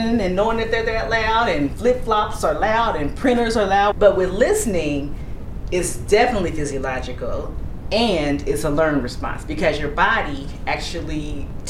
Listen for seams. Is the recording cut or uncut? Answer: cut